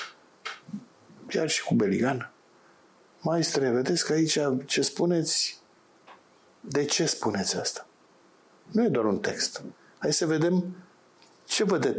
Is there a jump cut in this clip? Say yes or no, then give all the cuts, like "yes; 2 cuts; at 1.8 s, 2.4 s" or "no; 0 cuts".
no; 0 cuts